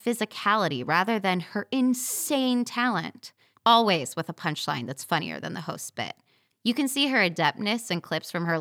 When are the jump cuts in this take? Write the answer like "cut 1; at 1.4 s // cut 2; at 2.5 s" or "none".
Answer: cut 1; at 3.6 s // cut 2; at 6.5 s